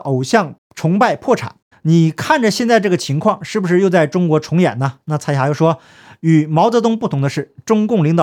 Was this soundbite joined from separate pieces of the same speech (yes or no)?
yes